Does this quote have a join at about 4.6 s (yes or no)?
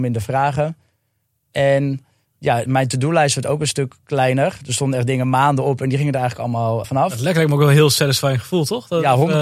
no